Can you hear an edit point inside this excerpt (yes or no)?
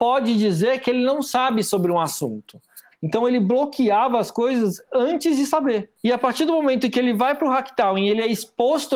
yes